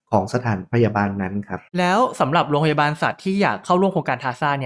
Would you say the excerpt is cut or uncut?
cut